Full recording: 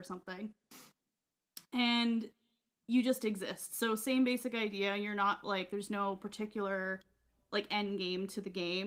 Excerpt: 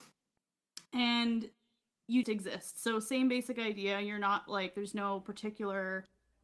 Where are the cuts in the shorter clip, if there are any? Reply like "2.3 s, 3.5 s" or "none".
2.2 s